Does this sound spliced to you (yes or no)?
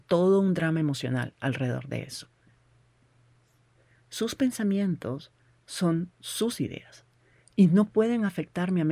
yes